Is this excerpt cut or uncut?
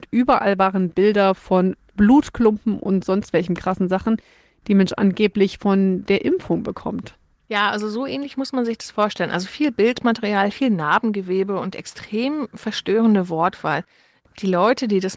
uncut